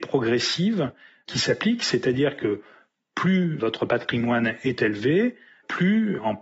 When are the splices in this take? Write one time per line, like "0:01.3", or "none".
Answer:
none